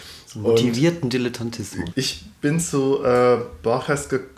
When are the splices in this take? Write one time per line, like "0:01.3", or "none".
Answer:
0:01.9

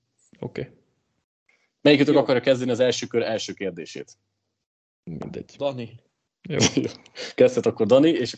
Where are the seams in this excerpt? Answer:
none

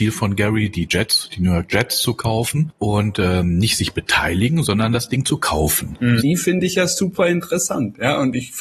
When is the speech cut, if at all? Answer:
0:06.2

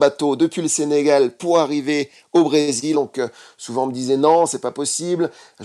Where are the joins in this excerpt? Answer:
0:02.9

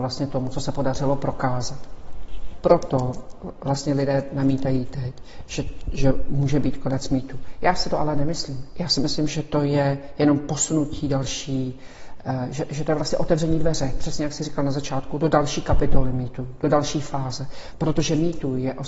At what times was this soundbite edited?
none

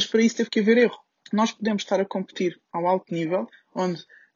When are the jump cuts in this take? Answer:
0:01.2

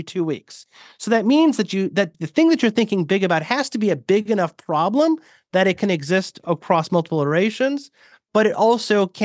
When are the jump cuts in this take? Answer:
0:02.1

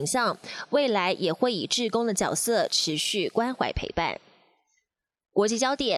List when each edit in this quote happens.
none

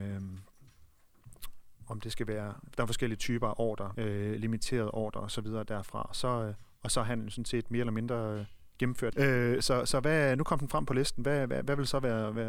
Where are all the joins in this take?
0:03.9
0:09.1

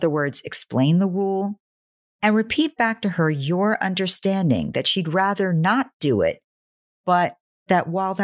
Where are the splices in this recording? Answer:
none

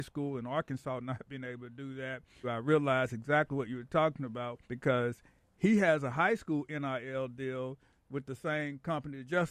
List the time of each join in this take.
0:02.4
0:04.6

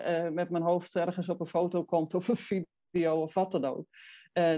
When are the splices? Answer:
none

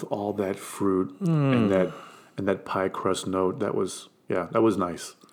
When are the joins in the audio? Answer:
none

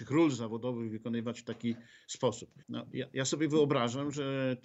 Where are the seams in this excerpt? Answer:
0:02.6

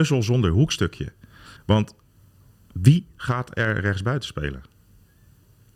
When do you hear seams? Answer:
0:01.6

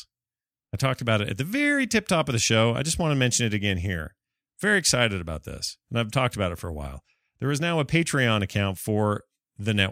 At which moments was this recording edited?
none

